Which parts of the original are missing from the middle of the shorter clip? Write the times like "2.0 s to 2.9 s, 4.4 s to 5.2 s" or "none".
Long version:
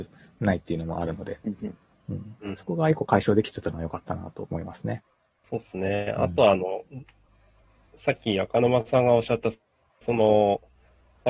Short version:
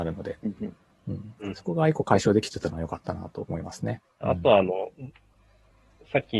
5.2 s to 6.1 s